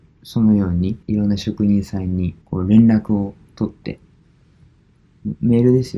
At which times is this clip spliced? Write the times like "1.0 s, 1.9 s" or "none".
1.0 s, 2.4 s

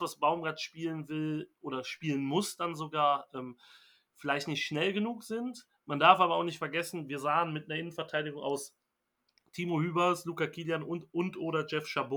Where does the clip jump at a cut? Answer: none

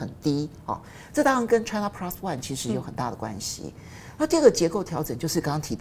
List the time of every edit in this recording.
none

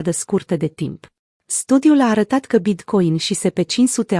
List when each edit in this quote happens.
1.3 s

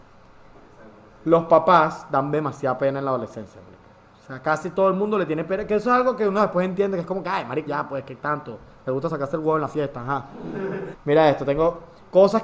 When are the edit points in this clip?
7.7 s, 10.9 s

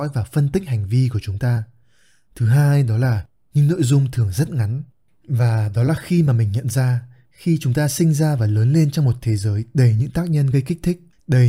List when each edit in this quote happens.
5.1 s

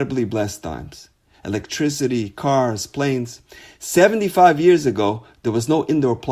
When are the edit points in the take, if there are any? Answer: 1.3 s

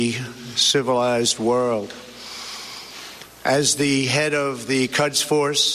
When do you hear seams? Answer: 3.3 s

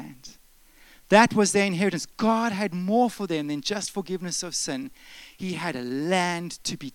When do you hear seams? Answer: none

